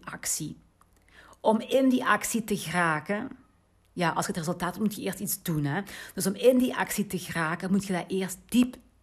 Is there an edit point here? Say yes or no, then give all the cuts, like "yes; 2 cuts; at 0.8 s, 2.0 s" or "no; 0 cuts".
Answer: no; 0 cuts